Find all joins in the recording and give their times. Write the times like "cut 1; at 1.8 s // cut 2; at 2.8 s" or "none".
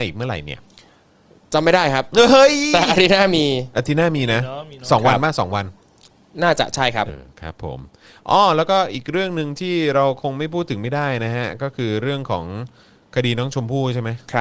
cut 1; at 7.1 s